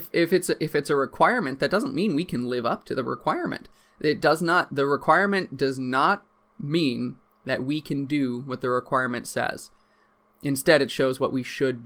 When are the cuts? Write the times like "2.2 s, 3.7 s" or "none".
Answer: none